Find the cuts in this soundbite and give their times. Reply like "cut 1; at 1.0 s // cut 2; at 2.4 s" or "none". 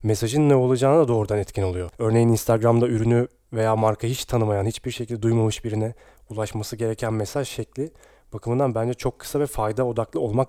cut 1; at 1.9 s